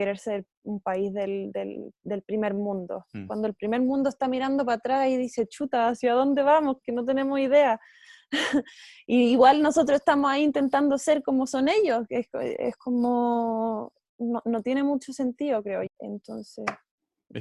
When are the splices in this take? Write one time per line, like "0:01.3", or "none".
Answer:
0:15.9